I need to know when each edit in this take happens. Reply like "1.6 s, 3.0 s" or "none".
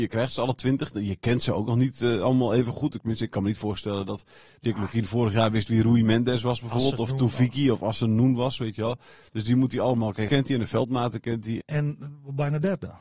10.3 s, 11.6 s